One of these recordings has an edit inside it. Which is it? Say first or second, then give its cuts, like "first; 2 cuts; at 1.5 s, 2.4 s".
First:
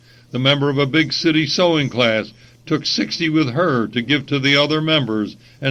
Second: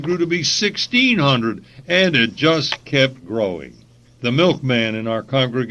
second; 1 cut; at 4.0 s